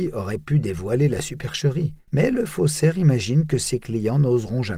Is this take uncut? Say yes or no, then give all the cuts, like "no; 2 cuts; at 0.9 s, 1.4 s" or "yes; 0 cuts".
no; 1 cut; at 2.1 s